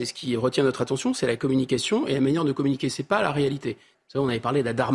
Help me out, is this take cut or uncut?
cut